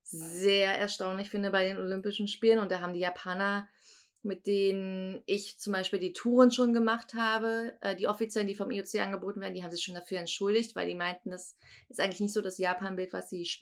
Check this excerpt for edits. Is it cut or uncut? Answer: uncut